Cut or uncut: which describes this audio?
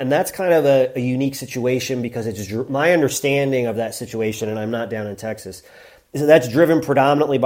uncut